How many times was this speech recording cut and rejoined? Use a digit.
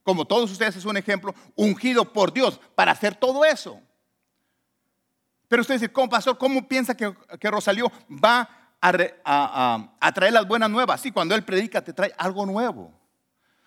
0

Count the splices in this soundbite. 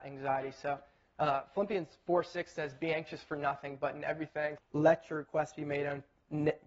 1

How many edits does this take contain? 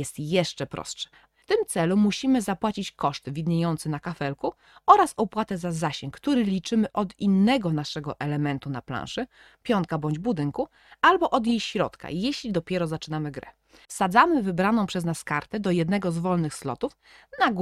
2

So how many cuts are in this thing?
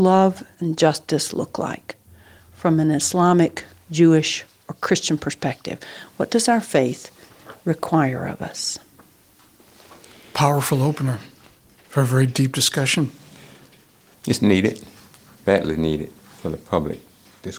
1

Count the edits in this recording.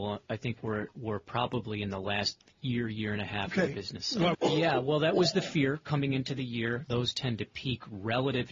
2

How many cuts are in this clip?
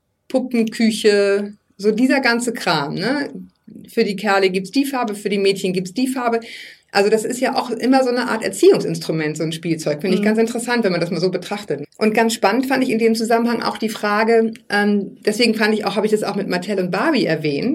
1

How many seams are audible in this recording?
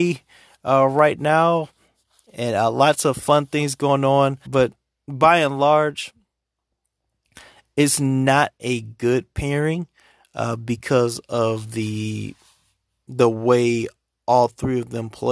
1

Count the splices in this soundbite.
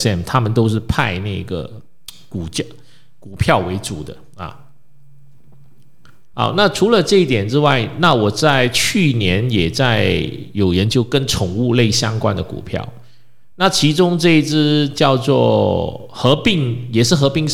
1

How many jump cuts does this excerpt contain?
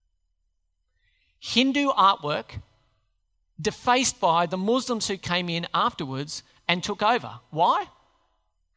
0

